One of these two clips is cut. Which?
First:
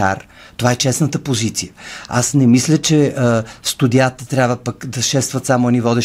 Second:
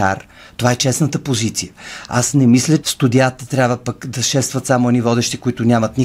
second; 1 cut; at 2.8 s

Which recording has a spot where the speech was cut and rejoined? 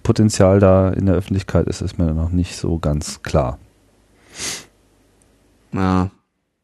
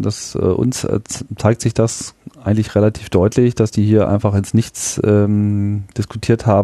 first; 1 cut; at 5.6 s

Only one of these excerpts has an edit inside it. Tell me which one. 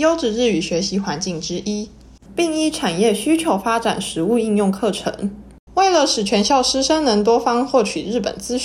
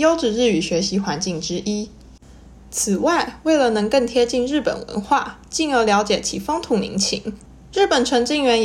first; 2 cuts; at 2.3 s, 5.7 s

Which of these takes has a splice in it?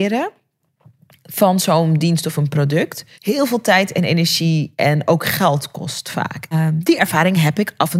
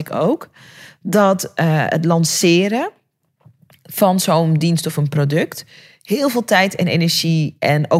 first; 2 cuts; at 3.1 s, 6.5 s

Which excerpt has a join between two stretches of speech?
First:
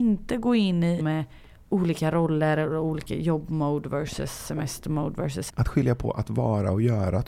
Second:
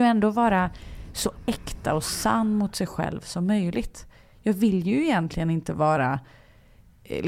first; 2 cuts; at 1.0 s, 5.5 s

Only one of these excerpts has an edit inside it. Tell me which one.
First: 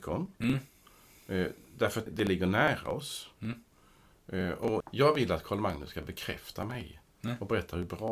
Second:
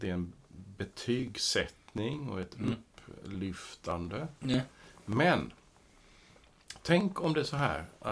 first; 2 cuts; at 2.1 s, 4.8 s

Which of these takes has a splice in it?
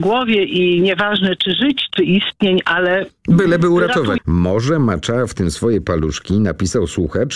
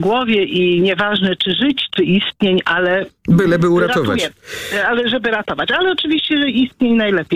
first; 1 cut; at 4.2 s

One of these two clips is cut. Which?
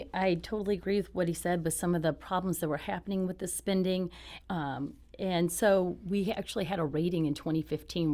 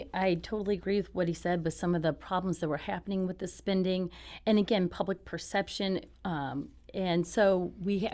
first; 1 cut; at 4.4 s

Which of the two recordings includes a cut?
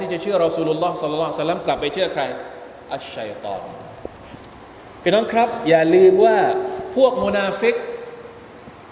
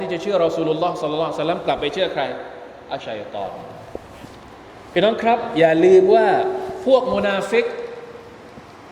second; 1 cut; at 3.0 s

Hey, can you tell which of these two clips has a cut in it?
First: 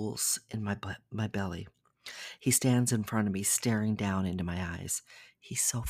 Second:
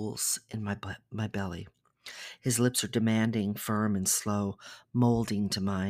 second; 1 cut; at 2.4 s

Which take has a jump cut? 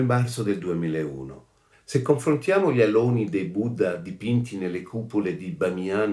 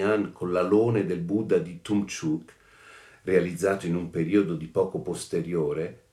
first; 1 cut; at 1.7 s

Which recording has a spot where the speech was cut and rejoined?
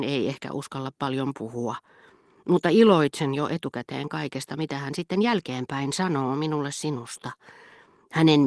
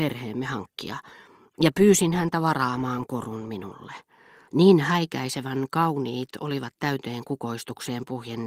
second; 1 cut; at 4.5 s

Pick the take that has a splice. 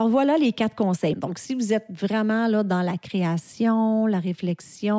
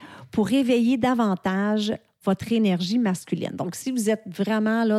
first; 1 cut; at 1.1 s

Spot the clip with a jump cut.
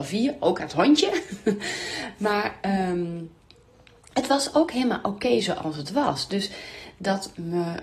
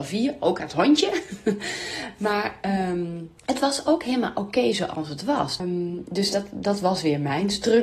second; 2 cuts; at 3.4 s, 5.6 s

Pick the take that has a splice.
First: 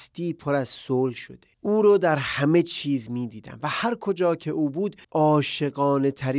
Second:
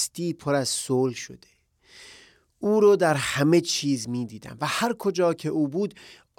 first; 2 cuts; at 1.5 s, 5.0 s

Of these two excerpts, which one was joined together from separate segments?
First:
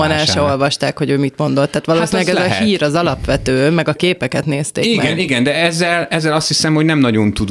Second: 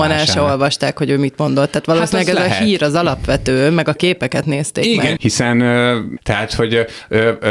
second; 2 cuts; at 5.2 s, 6.2 s

